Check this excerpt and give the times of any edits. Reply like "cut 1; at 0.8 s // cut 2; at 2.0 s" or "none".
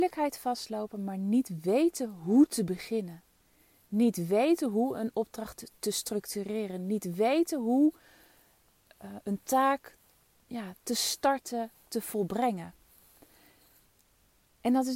none